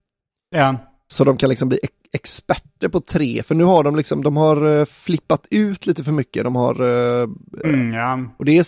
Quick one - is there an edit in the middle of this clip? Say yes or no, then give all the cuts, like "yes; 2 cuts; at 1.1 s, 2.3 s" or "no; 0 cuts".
yes; 1 cut; at 7.6 s